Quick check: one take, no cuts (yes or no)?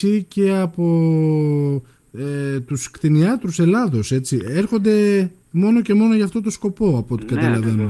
yes